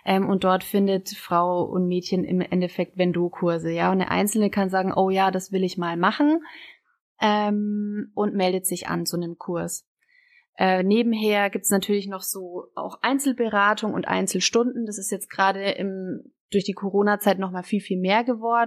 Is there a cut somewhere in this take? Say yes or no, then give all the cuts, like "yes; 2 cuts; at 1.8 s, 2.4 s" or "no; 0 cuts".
no; 0 cuts